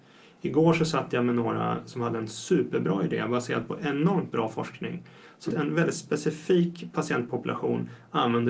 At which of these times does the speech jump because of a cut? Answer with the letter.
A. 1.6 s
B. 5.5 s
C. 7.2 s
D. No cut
B